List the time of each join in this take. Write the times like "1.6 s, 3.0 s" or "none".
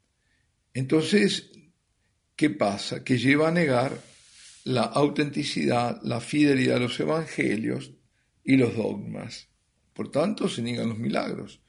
9.8 s